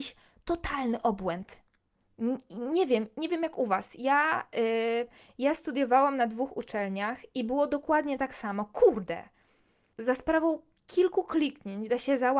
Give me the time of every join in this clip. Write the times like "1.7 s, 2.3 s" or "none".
9.9 s